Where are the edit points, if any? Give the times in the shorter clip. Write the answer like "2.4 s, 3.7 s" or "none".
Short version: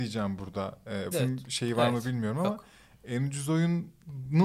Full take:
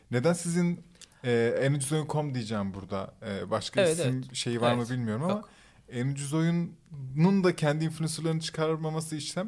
1.1 s